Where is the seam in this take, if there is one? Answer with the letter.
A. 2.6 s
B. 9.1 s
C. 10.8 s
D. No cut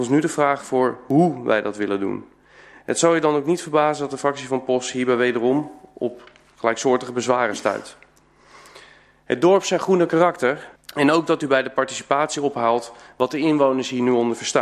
C